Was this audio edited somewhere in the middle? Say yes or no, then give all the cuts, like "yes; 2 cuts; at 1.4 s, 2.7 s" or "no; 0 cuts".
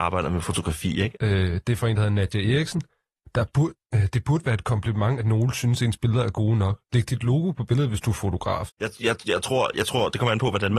yes; 3 cuts; at 1.1 s, 3.8 s, 8.7 s